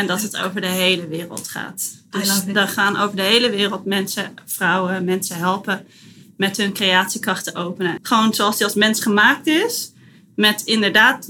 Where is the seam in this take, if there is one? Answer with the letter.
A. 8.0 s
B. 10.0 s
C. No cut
A